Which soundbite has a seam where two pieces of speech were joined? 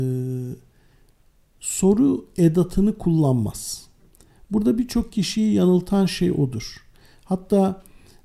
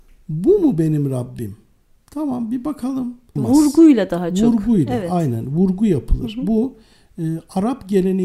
second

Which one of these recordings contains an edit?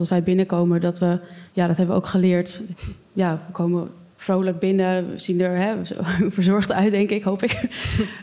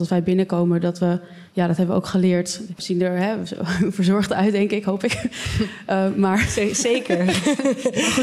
second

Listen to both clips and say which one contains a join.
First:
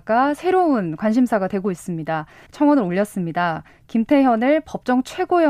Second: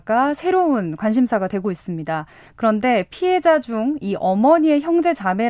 first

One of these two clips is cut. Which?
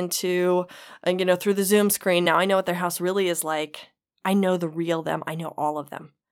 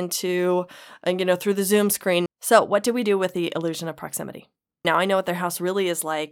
second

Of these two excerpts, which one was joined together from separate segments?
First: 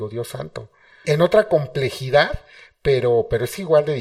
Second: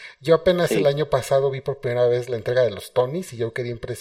first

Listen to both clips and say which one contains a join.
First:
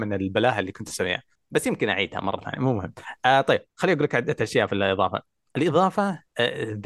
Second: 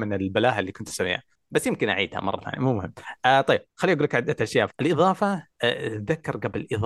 second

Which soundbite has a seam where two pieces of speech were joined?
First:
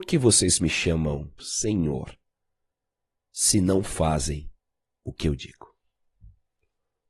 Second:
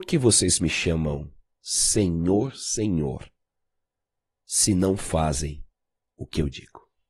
first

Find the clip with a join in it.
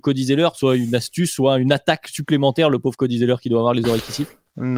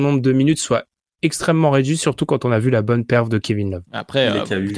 second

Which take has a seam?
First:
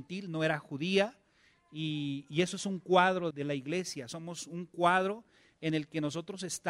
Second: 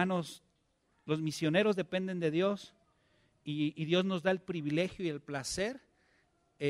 first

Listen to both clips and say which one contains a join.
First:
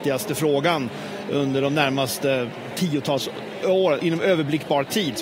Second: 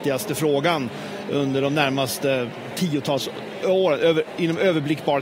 first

